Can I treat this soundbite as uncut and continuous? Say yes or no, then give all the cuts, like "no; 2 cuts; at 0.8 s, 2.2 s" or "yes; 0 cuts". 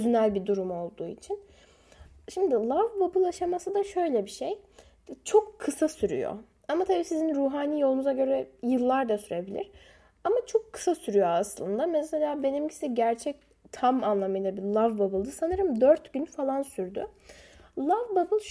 yes; 0 cuts